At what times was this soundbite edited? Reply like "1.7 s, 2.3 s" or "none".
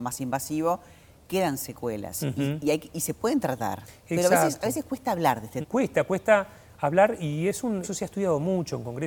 5.6 s, 7.8 s

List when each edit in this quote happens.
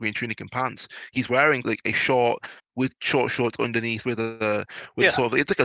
1.6 s, 4.0 s

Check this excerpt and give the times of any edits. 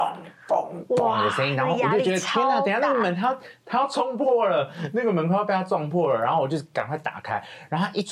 none

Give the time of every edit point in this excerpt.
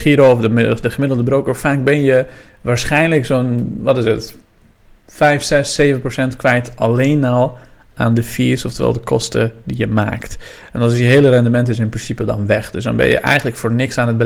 none

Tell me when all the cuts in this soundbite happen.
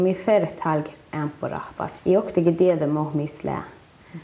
2.0 s

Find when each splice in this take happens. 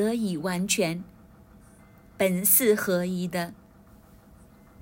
none

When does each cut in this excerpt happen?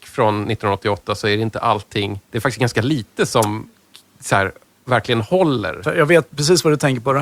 2.2 s

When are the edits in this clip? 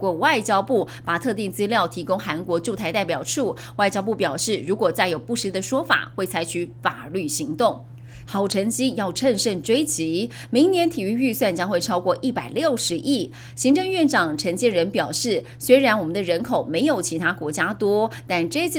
8.3 s

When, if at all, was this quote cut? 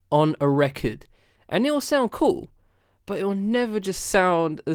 1.4 s

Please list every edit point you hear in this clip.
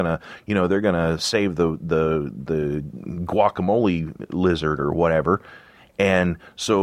none

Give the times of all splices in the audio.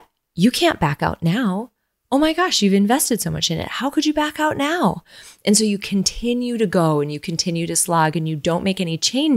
none

